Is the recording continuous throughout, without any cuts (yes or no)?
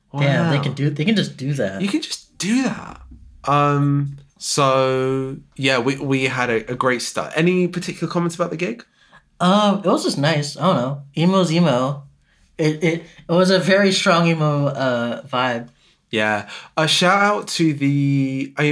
no